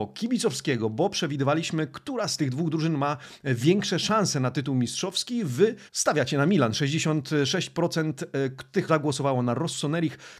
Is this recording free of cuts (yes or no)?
no